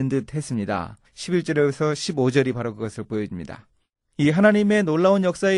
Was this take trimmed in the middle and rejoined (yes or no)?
yes